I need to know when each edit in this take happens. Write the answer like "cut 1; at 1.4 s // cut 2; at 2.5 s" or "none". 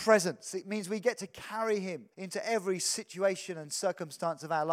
cut 1; at 2.1 s